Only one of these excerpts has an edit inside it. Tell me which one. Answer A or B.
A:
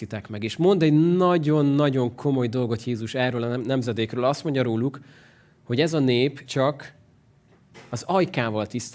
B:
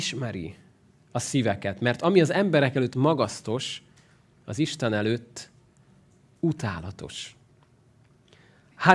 A